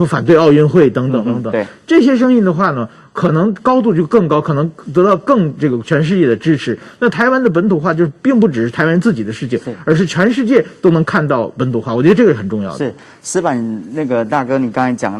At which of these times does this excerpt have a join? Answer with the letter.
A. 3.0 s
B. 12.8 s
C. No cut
C